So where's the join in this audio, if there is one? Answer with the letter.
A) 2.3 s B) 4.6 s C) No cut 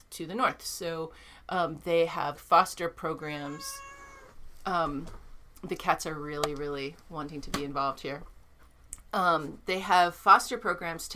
A